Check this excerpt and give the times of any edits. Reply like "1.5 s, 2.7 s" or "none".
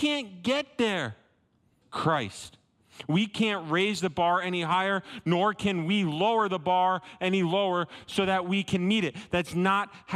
1.8 s